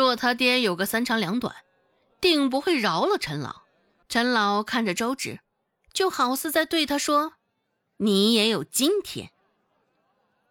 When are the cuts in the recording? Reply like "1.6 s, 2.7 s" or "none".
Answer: 4.0 s